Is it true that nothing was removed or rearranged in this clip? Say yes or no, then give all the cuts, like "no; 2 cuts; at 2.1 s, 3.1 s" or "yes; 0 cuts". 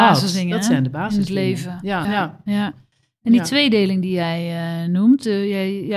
no; 1 cut; at 2.0 s